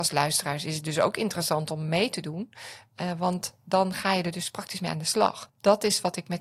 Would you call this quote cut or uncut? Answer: cut